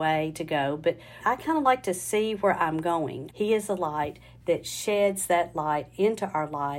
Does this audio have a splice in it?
yes; 2 cuts; at 1.2 s, 3.3 s

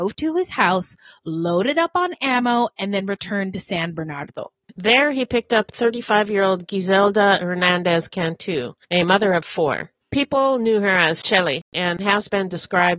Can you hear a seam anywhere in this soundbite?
no; 0 cuts

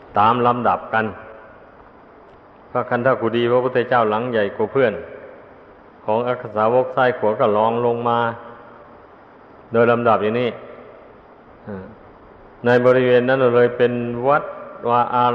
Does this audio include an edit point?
no; 0 cuts

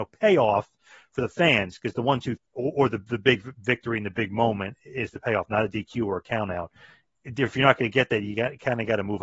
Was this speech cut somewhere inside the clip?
yes; 1 cut; at 2.4 s

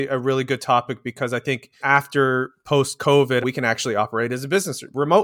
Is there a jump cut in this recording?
yes; 2 cuts; at 1.8 s, 3.4 s

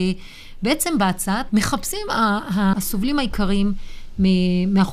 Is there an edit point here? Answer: yes; 2 cuts; at 1.5 s, 2.7 s

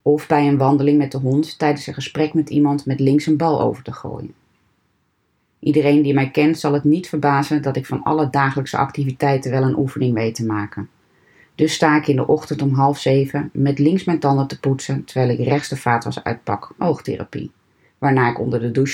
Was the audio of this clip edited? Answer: yes; 1 cut; at 16.8 s

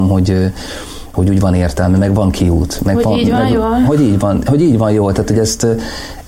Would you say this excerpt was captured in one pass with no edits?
yes; 0 cuts

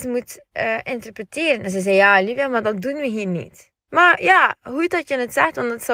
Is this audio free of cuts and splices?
yes; 0 cuts

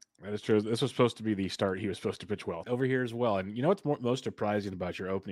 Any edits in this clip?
yes; 1 cut; at 2.6 s

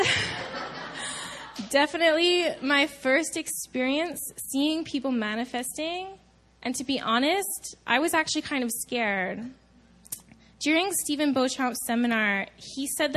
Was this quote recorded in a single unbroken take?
yes; 0 cuts

